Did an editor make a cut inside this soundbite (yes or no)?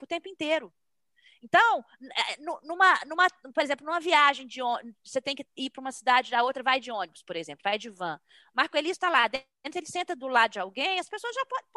no